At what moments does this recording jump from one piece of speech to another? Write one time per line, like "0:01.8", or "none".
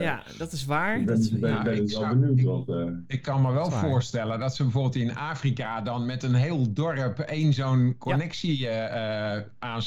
none